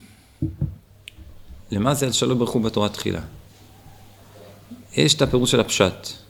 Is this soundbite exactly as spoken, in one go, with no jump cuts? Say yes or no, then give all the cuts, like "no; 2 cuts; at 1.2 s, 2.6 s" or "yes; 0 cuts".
yes; 0 cuts